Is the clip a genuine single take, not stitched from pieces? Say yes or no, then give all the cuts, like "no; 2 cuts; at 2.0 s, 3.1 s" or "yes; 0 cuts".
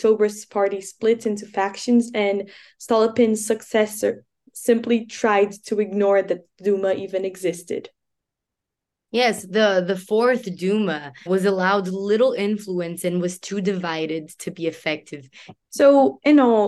no; 2 cuts; at 11.3 s, 15.5 s